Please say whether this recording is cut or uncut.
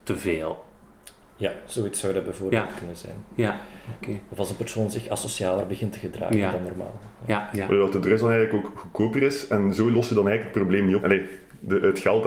cut